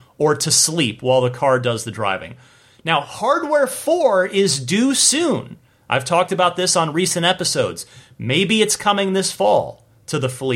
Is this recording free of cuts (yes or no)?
yes